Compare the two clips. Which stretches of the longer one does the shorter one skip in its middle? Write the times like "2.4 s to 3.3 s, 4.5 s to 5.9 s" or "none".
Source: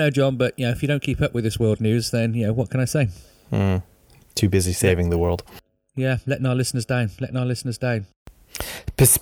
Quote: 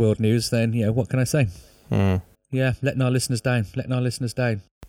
4.0 s to 5.8 s